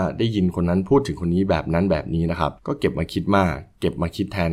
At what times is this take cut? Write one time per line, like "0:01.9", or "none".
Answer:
0:02.6